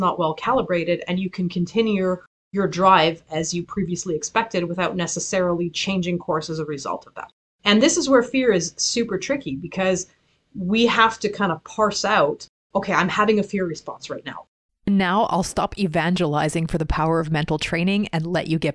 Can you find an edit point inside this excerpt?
yes; 2 cuts; at 12.7 s, 14.7 s

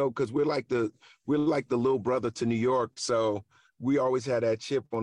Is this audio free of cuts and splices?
yes; 0 cuts

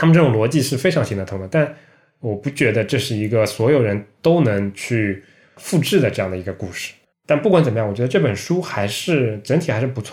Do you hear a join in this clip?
yes; 1 cut; at 7.1 s

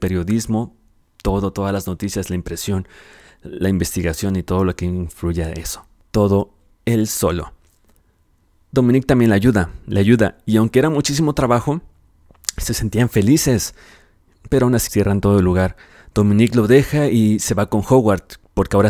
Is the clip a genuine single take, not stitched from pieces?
no; 1 cut; at 14.9 s

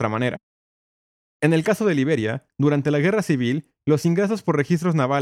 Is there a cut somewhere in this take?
no; 0 cuts

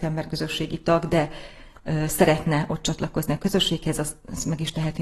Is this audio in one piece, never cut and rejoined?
yes; 0 cuts

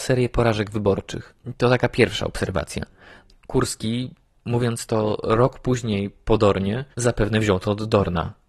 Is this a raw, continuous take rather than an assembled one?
no; 2 cuts; at 3.3 s, 6.9 s

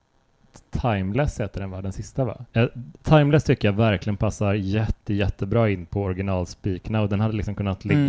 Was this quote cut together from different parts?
yes; 1 cut; at 2.5 s

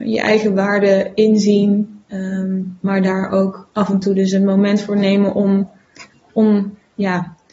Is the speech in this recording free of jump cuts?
yes; 0 cuts

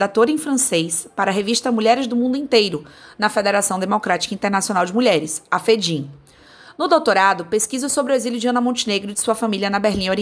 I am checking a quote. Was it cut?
no; 0 cuts

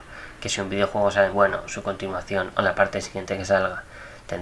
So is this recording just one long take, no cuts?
no; 1 cut; at 1.3 s

